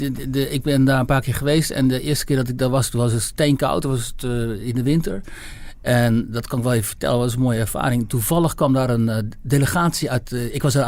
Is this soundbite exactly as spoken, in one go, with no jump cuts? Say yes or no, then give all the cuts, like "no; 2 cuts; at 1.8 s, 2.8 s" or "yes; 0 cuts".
yes; 0 cuts